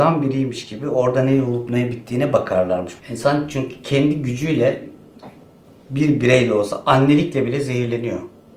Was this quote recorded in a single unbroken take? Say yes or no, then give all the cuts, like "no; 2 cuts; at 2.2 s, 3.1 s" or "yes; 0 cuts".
no; 1 cut; at 3.0 s